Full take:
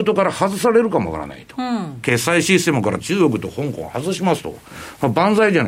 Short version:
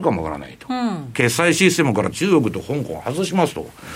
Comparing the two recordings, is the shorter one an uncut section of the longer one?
yes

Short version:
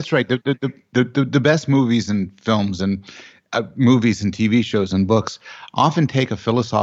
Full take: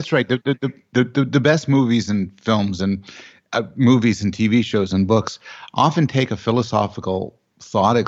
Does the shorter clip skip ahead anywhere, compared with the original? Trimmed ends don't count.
no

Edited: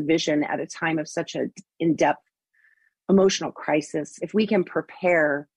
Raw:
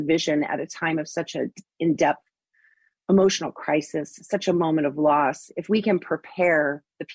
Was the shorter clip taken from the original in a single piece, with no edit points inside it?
no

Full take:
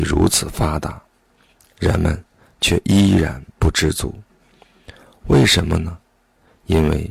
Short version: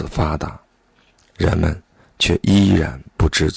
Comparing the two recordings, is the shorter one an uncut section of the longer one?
yes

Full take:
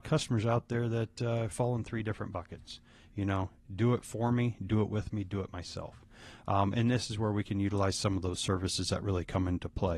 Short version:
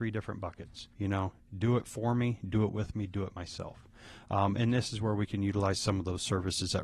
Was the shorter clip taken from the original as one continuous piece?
no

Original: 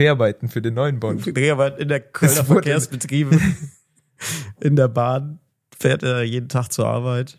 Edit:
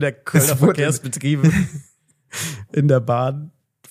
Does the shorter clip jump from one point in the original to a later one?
no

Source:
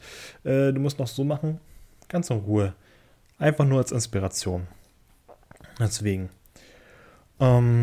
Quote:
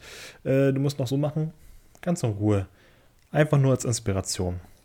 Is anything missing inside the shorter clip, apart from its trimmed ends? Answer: yes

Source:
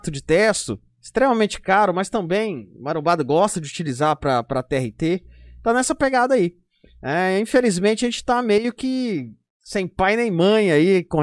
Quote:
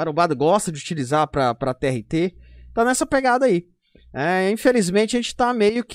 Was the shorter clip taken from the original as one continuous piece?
yes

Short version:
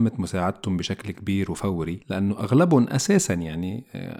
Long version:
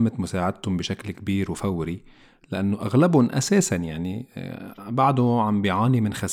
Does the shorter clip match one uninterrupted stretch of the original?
no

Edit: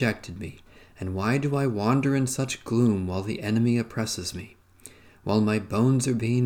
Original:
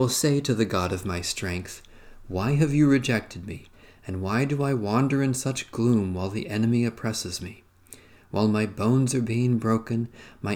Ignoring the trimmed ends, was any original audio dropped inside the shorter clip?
no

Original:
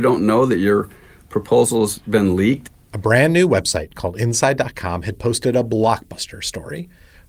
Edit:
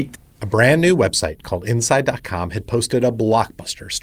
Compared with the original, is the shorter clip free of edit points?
yes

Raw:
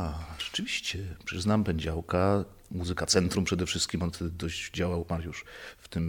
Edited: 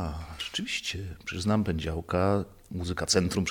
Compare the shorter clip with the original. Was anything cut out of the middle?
no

